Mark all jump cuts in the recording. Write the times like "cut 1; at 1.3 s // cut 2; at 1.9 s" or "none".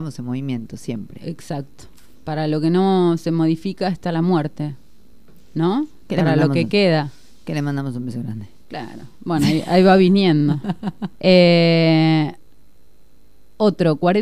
cut 1; at 11.1 s